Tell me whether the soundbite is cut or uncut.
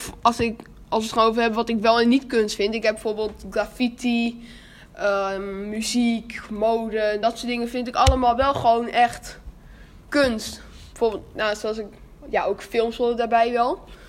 uncut